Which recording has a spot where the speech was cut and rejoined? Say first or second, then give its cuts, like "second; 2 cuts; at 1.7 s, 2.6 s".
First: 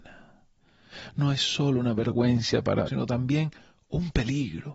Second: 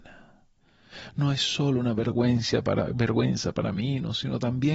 first; 1 cut; at 2.9 s